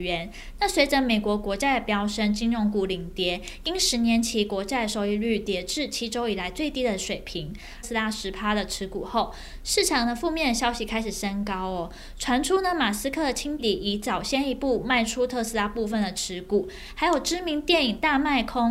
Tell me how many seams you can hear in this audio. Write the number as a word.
two